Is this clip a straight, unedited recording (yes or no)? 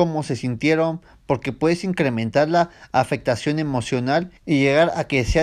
no